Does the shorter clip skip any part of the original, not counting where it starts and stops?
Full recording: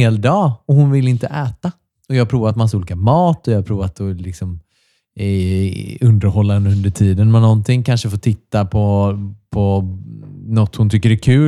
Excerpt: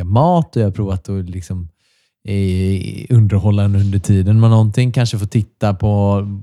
no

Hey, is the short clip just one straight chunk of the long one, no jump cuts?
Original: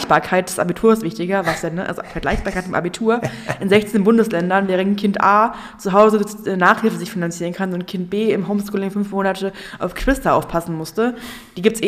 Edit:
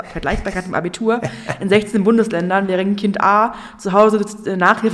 yes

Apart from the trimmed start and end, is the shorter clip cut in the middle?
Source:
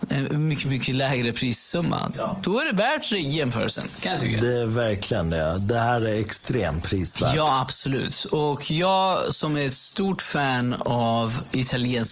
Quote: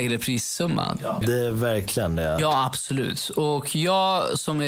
yes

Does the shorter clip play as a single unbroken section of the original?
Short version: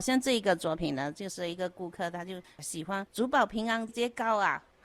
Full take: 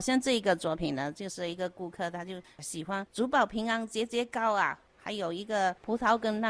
no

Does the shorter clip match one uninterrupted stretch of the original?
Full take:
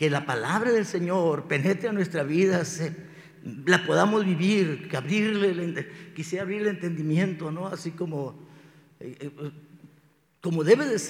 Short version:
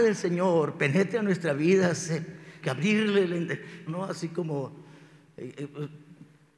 no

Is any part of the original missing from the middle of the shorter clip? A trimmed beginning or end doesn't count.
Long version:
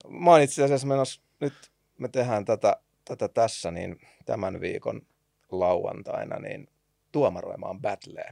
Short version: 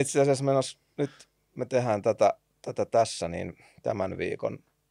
no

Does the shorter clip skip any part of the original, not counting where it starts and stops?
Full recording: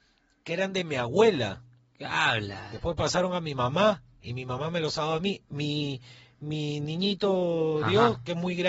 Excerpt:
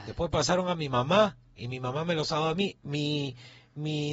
no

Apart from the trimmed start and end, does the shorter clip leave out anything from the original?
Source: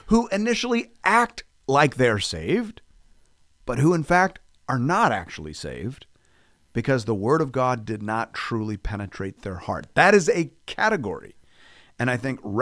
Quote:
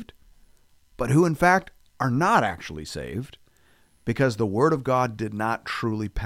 no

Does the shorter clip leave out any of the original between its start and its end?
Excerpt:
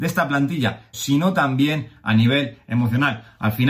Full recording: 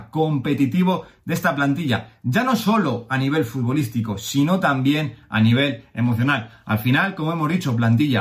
yes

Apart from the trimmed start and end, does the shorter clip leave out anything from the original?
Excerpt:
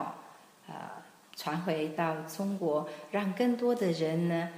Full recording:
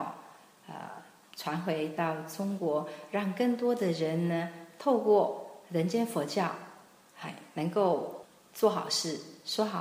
no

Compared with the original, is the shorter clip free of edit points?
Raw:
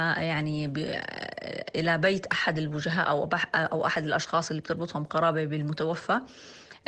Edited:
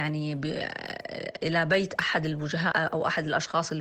no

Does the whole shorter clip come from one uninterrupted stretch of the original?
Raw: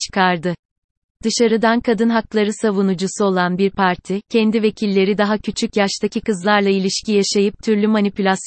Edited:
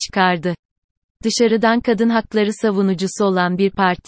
yes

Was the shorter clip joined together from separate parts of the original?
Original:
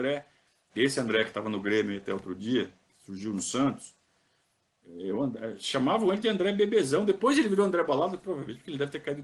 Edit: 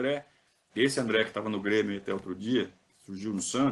no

